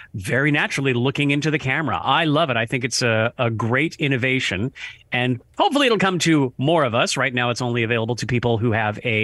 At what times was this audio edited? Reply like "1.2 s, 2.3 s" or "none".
none